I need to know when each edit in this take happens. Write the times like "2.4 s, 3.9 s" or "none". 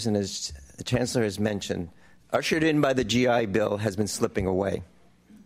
2.2 s